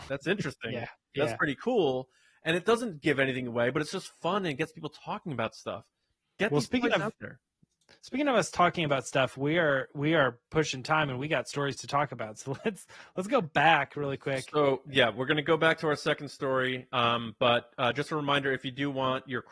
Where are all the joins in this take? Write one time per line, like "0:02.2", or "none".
none